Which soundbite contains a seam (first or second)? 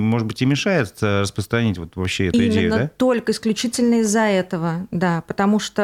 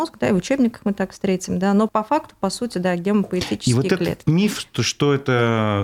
second